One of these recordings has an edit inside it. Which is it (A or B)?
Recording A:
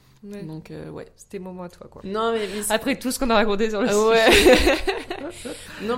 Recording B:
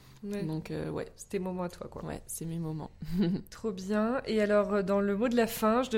A